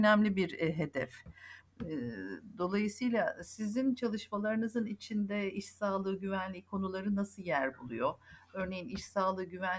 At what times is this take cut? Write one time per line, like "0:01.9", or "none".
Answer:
none

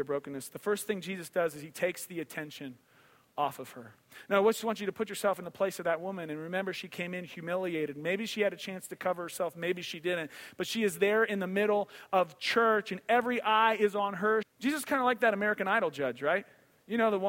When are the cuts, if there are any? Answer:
0:14.4

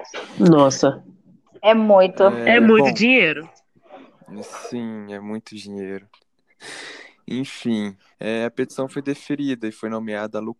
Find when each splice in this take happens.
0:01.5
0:06.2
0:08.1

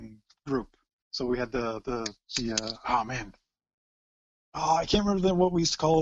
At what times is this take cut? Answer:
none

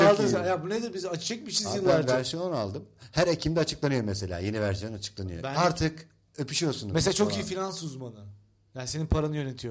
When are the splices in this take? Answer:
none

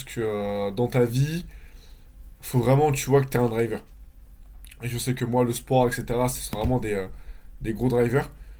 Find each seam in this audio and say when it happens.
none

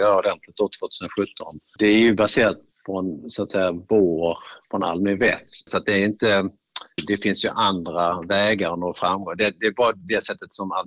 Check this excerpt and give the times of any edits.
0:05.7
0:07.0

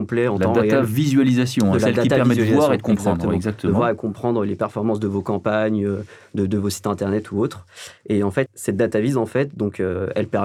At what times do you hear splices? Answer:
0:08.5

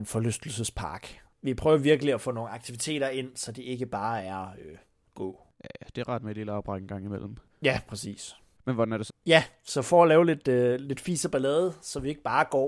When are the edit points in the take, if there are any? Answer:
0:09.1

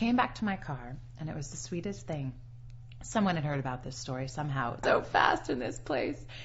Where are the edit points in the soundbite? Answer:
0:04.8

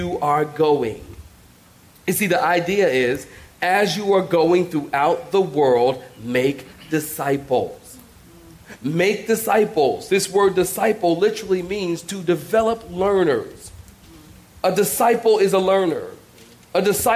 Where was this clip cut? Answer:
none

